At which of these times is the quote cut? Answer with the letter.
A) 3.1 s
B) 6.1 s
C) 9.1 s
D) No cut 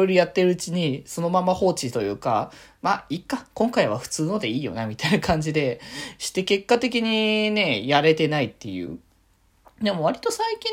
D